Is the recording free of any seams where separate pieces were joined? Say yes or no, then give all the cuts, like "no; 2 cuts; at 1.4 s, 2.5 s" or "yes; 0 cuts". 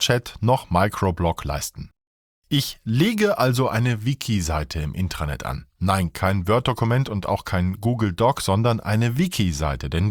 yes; 0 cuts